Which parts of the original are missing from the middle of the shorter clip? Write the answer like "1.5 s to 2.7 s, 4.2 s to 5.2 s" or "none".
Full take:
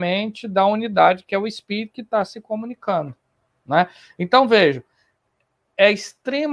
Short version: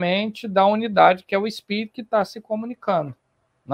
none